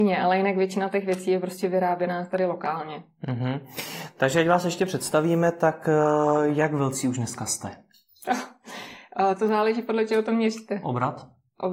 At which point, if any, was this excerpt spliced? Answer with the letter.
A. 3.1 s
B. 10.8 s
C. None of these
C